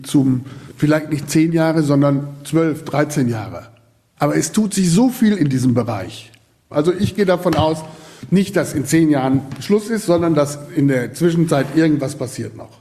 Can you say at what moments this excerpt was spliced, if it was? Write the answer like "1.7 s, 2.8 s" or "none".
none